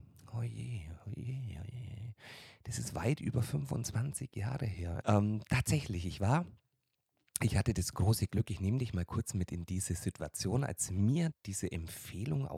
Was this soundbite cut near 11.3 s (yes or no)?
yes